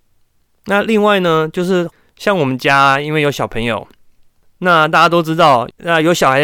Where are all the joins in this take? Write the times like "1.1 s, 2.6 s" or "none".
none